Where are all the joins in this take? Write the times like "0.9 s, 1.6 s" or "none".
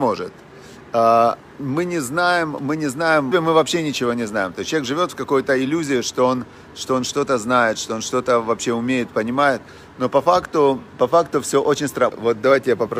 3.3 s, 10.9 s, 12.1 s